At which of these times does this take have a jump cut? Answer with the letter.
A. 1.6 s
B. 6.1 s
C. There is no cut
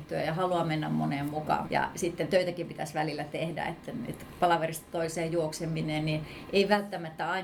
A